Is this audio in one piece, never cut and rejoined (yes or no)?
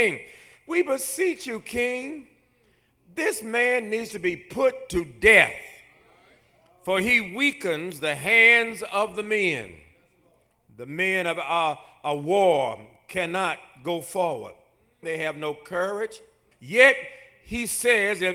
no